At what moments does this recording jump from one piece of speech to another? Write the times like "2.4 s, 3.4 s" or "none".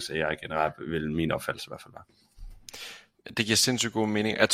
none